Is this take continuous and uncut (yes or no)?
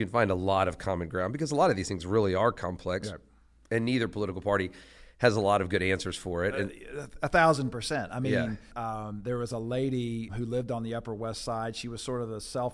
no